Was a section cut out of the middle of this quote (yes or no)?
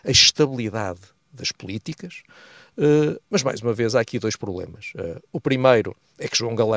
no